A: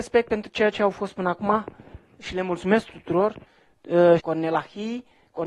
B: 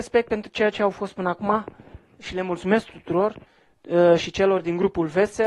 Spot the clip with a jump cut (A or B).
A